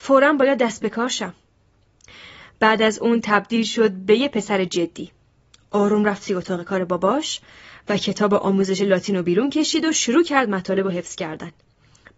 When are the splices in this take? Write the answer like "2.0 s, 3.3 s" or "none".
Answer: none